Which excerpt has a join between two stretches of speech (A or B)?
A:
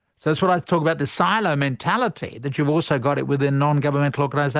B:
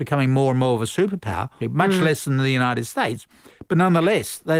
B